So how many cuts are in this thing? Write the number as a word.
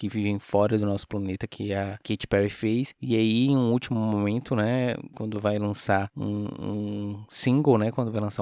zero